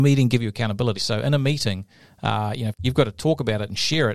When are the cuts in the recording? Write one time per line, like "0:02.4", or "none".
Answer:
0:01.0
0:02.7

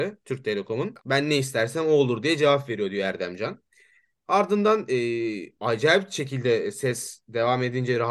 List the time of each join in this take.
0:01.0

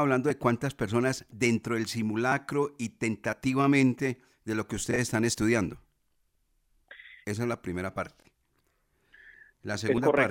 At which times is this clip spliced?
0:07.2

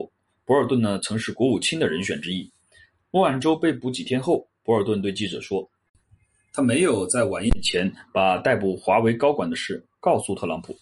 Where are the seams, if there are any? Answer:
none

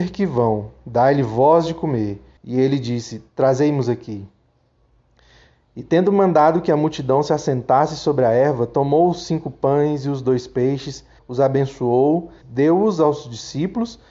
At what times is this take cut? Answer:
0:02.4
0:11.2
0:12.4

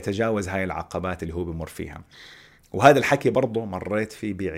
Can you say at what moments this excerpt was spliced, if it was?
none

